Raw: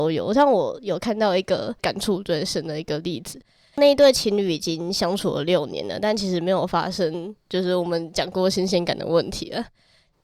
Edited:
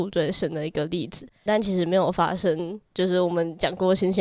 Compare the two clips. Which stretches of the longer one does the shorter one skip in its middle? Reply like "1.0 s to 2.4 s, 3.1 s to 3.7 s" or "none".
3.6 s to 6.0 s